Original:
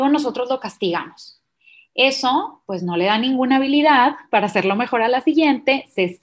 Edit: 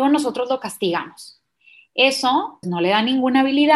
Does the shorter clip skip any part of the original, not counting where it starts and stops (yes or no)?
yes